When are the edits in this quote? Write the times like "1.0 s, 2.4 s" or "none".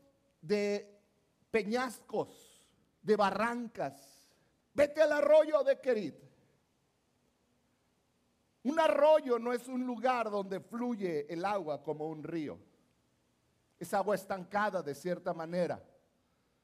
4.6 s